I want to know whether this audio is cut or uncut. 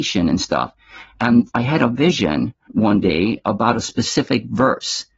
cut